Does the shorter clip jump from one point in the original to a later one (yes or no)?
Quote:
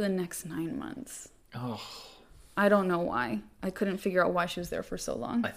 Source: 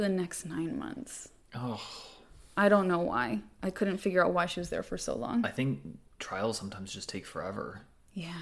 no